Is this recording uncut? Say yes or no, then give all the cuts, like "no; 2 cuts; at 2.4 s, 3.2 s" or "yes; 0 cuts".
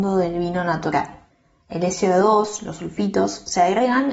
yes; 0 cuts